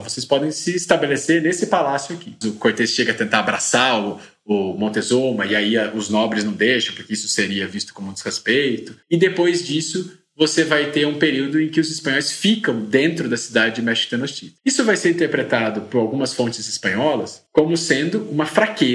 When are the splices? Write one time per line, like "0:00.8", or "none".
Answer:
0:02.4
0:14.6